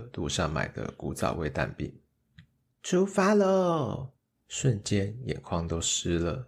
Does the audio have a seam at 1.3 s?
no; 2 cuts; at 2.7 s, 4.4 s

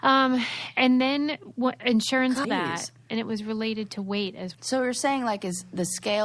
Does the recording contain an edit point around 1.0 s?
no; 2 cuts; at 2.4 s, 4.5 s

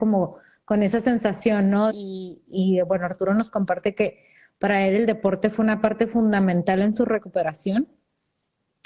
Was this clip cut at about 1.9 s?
yes; 1 cut; at 1.9 s

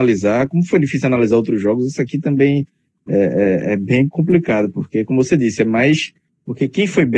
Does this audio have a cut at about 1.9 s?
no; 1 cut; at 6.3 s

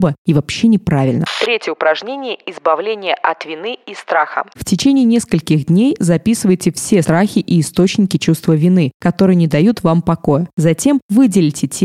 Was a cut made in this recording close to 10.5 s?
no; 1 cut; at 7.0 s

